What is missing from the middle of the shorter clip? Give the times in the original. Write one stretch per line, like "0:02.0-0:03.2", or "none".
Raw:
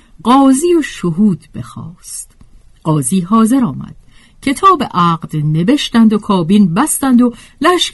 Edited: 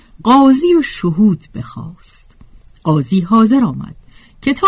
none